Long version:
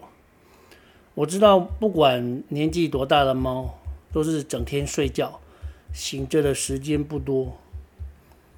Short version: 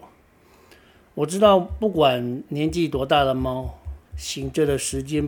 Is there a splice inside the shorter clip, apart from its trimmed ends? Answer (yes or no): yes